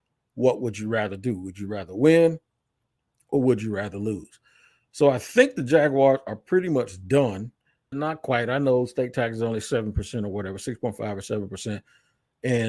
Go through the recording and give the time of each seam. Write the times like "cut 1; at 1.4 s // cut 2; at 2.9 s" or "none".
cut 1; at 7.9 s